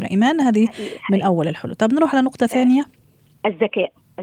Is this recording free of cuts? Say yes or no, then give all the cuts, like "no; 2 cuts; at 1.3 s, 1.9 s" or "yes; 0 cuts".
yes; 0 cuts